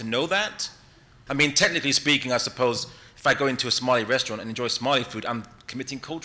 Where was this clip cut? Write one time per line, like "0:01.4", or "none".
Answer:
0:01.3